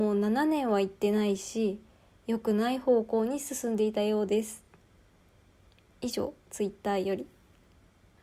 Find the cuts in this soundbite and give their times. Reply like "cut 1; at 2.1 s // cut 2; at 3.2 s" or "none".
none

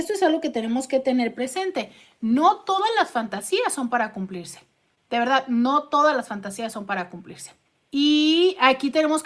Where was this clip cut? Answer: none

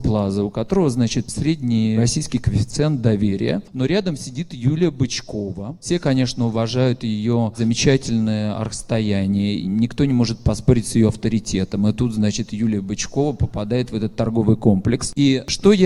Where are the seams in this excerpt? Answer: none

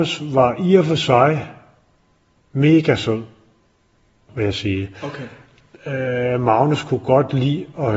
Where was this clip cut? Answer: cut 1; at 4.3 s

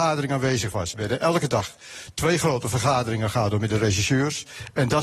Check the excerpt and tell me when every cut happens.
cut 1; at 0.9 s

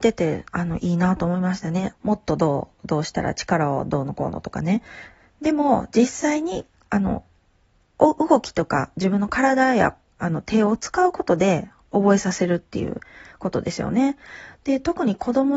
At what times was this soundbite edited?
cut 1; at 1.9 s

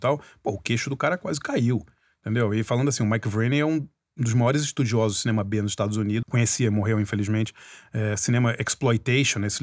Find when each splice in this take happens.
cut 1; at 6.2 s

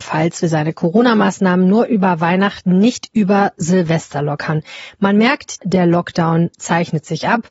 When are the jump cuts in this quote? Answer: cut 1; at 5.6 s

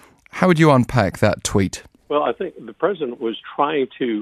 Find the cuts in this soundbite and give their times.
cut 1; at 2.0 s // cut 2; at 3.2 s

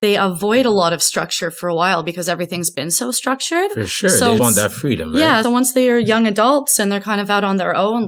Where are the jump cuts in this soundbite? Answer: cut 1; at 4.4 s // cut 2; at 5.4 s

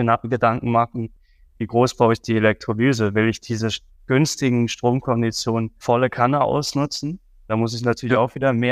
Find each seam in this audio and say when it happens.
none

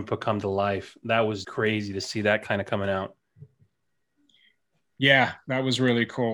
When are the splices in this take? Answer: cut 1; at 1.4 s

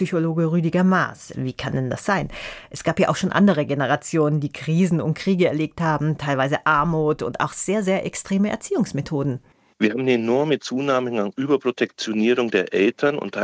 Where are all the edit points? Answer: cut 1; at 1.3 s // cut 2; at 9.7 s

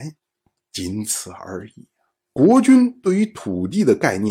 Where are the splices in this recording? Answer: cut 1; at 2.2 s

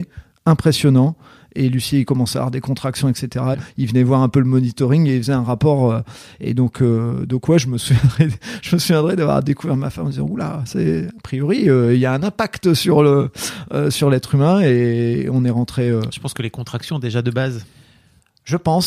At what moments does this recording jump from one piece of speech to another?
cut 1; at 3.5 s

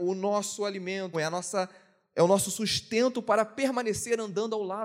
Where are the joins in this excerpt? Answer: cut 1; at 1.1 s

